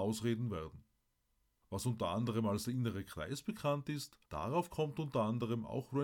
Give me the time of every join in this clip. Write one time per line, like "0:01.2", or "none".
0:01.6
0:04.2

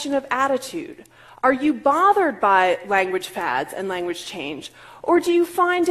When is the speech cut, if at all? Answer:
none

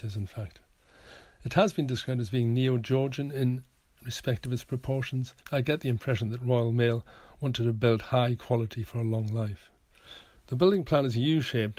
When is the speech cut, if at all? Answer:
0:05.4

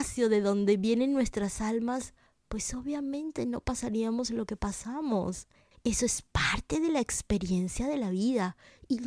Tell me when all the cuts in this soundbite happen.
0:05.7

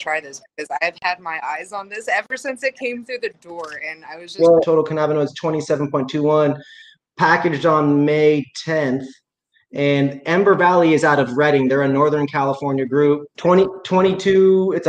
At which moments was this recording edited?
0:04.6
0:13.3

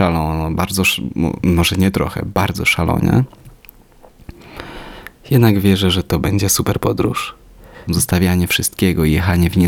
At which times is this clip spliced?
0:07.9

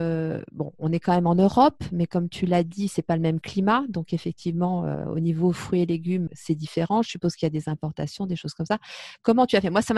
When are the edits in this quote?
0:06.3

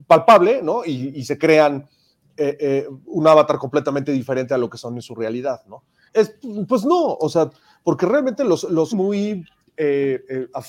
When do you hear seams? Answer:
0:06.1
0:08.9

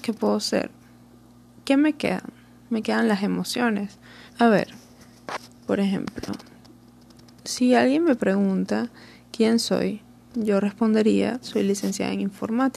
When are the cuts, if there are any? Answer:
0:04.3
0:11.4

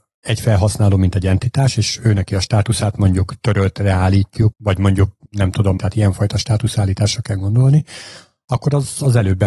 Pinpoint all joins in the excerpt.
0:04.5
0:05.8

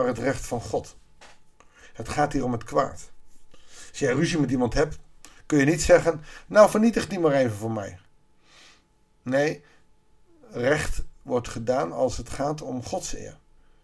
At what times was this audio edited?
none

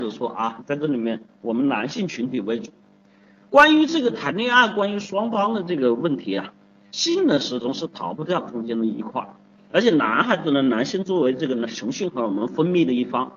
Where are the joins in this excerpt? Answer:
none

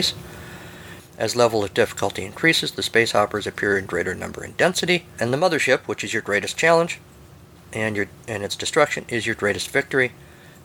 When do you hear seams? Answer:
0:01.0

